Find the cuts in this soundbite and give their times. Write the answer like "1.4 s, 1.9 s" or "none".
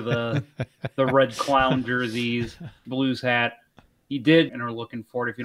2.8 s, 4.5 s